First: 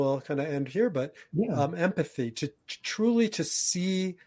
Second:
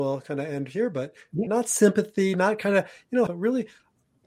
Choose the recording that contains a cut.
second; 2 cuts; at 1.5 s, 3.3 s

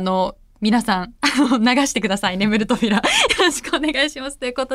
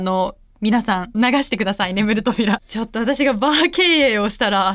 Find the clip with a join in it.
second; 2 cuts; at 1.1 s, 2.6 s

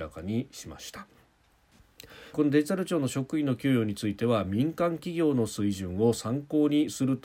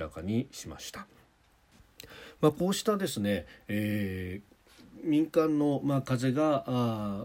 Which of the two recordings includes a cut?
first; 1 cut; at 2.3 s

